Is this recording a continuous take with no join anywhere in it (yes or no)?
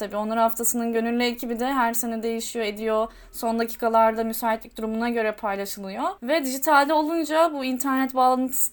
no